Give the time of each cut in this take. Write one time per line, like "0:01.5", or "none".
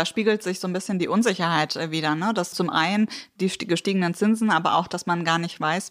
0:02.5